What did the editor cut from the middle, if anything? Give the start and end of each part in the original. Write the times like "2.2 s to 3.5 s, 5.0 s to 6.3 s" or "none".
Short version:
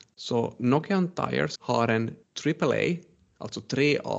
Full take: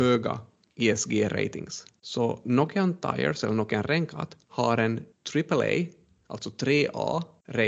3.4 s to 4.4 s

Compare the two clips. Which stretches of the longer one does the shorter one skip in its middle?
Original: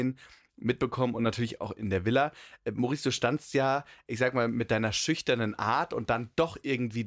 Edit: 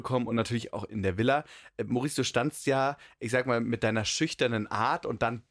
none

